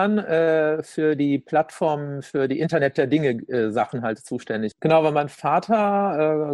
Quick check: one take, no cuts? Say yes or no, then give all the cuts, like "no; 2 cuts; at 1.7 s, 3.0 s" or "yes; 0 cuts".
no; 1 cut; at 4.7 s